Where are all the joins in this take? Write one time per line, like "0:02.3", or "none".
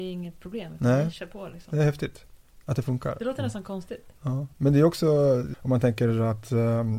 0:04.5
0:05.5